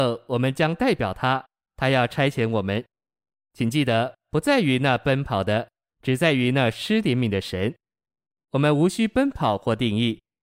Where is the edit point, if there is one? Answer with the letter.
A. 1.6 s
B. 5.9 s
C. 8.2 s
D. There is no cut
B